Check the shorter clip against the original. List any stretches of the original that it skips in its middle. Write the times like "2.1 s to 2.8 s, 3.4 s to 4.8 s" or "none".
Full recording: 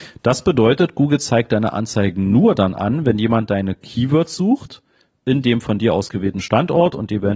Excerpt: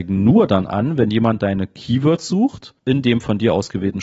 4.9 s to 5.2 s